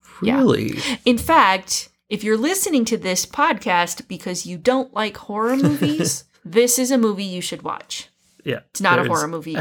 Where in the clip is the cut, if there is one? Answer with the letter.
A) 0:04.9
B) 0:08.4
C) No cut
C